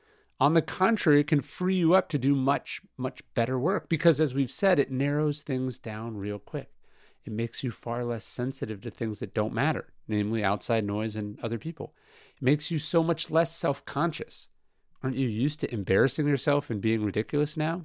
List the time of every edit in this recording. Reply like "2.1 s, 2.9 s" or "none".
none